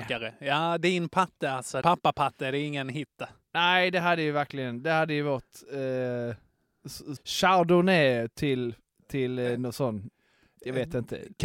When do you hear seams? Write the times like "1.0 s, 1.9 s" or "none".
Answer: 1.8 s, 7.2 s